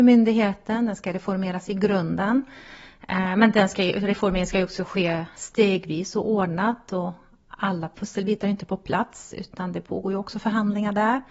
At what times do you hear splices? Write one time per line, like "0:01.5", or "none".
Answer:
none